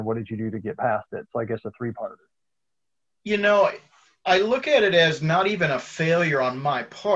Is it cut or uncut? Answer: uncut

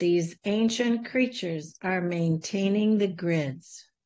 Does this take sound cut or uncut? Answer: uncut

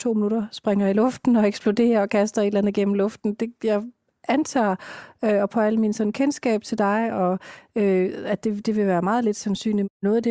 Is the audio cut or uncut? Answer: uncut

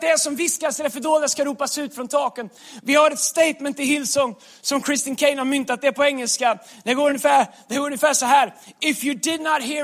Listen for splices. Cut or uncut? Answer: uncut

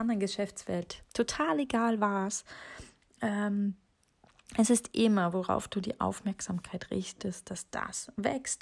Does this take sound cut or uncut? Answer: uncut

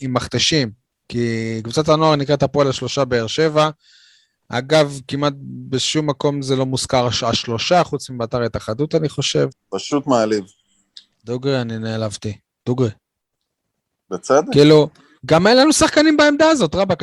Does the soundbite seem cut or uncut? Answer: cut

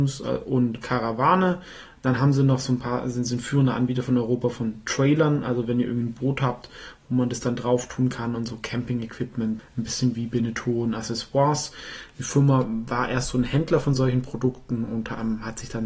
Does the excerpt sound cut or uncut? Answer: cut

